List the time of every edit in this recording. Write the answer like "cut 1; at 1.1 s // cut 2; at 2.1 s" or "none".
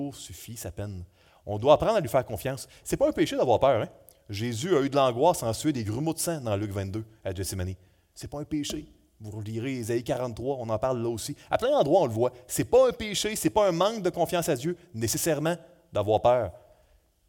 none